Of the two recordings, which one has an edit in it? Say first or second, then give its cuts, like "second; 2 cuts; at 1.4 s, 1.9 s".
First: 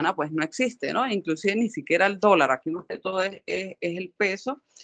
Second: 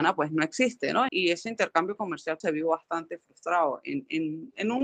second; 2 cuts; at 1.1 s, 2.4 s